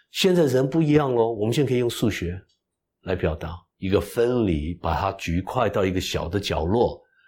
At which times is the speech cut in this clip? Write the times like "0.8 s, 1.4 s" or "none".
3.7 s